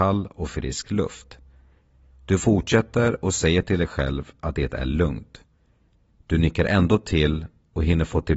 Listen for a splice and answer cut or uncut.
uncut